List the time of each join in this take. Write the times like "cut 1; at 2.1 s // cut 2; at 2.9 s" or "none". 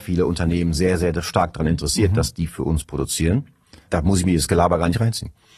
cut 1; at 3.9 s